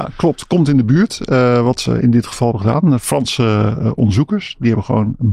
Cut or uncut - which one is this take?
uncut